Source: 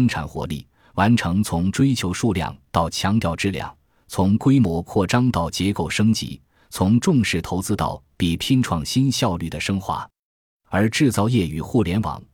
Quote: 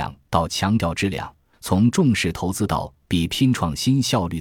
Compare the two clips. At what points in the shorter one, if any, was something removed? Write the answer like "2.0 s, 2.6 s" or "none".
1.5 s